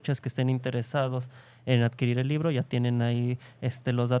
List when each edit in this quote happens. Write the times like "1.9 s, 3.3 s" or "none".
none